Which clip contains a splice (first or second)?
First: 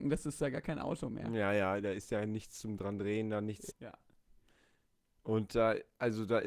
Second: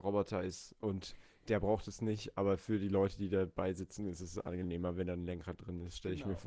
first